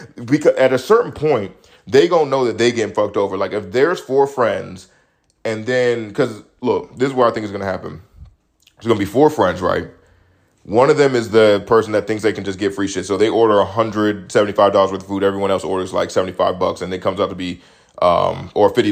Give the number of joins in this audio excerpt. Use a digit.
0